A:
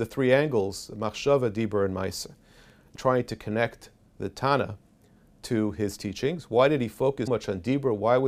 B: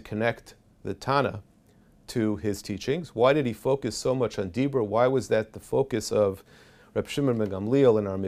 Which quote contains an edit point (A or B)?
A